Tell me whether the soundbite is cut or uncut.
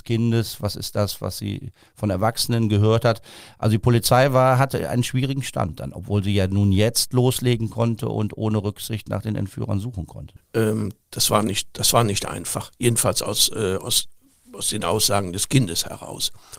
uncut